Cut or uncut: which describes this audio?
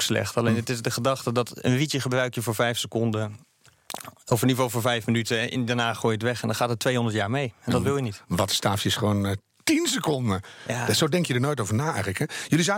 uncut